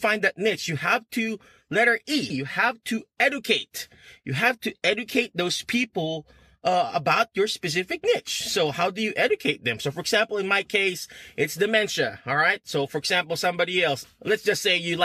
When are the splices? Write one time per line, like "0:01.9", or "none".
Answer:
0:02.3
0:14.0